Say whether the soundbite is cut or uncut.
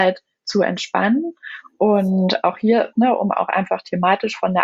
cut